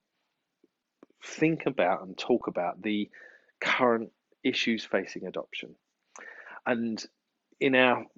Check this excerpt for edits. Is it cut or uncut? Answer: uncut